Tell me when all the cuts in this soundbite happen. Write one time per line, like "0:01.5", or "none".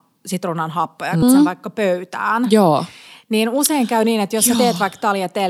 0:01.2